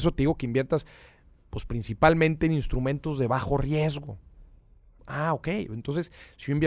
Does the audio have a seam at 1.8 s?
no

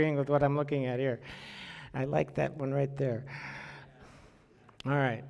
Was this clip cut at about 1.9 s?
no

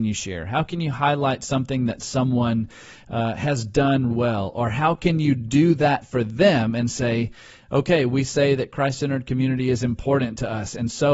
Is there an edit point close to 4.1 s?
yes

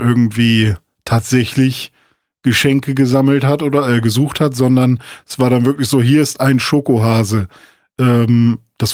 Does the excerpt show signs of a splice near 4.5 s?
no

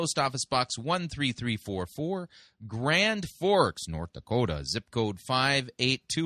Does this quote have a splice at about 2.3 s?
no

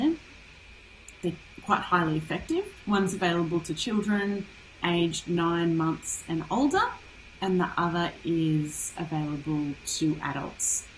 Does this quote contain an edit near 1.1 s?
no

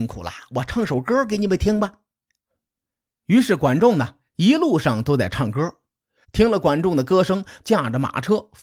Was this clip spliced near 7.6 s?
yes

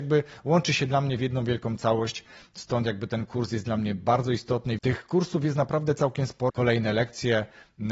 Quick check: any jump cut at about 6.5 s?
yes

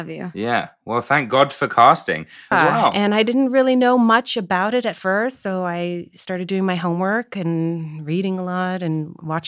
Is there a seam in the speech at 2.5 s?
yes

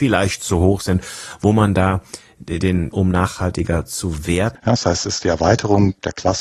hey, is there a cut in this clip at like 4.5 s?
yes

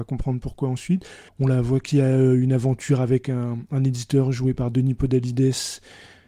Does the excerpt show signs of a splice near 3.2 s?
no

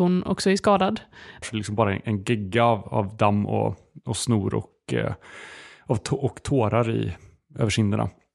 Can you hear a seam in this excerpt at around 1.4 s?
yes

